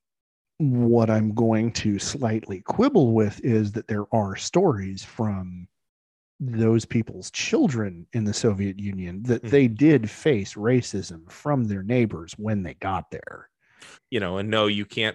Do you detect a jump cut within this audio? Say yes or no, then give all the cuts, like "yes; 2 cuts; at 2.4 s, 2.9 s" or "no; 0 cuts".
yes; 1 cut; at 13.9 s